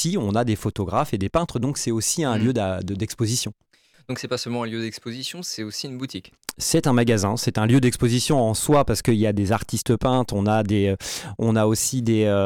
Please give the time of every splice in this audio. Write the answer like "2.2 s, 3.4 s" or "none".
3.9 s